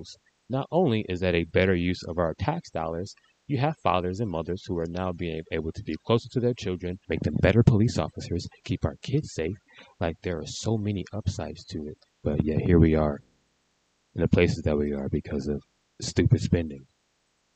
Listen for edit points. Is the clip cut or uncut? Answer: cut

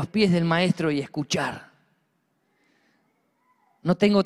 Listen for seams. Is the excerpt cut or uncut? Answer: uncut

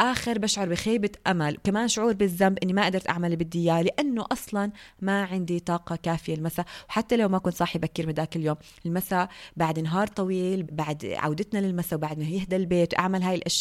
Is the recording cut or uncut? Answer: cut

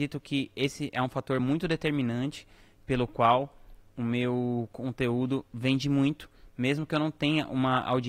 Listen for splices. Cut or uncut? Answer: uncut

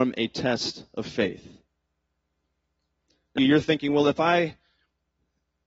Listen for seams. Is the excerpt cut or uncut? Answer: cut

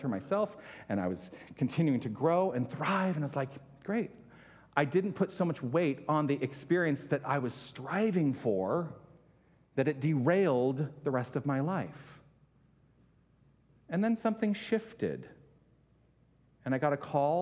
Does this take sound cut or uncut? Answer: uncut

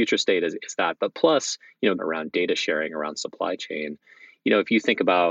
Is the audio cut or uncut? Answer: cut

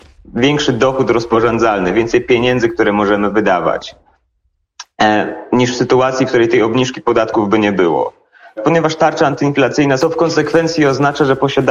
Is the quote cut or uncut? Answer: cut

